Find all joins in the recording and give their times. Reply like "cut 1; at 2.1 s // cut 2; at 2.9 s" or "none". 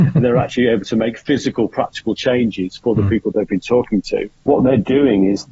cut 1; at 4.3 s